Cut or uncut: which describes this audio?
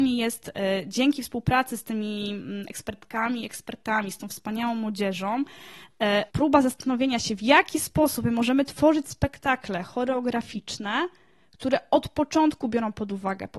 cut